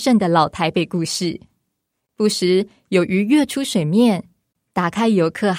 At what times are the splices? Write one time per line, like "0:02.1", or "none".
0:02.1
0:04.5